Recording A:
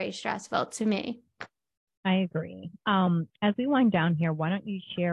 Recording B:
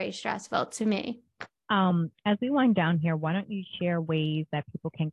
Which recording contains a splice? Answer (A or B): B